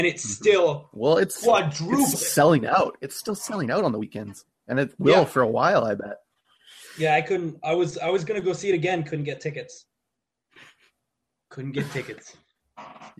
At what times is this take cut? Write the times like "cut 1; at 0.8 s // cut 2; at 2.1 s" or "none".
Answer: cut 1; at 2.1 s